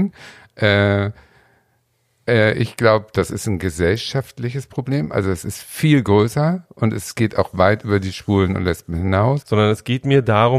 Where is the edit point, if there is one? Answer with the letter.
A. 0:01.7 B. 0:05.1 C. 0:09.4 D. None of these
C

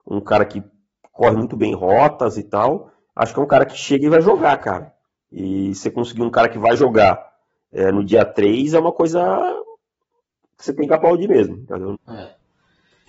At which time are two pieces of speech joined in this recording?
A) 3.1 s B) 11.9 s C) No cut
B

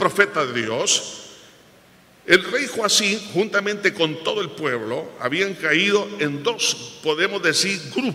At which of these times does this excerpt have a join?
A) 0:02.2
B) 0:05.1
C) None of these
C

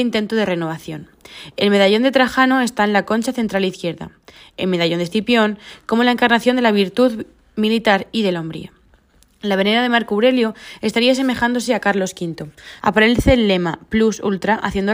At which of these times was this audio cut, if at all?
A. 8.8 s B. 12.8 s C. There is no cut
B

